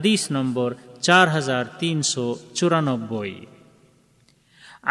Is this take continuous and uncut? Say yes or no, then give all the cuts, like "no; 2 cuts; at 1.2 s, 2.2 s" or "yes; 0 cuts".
yes; 0 cuts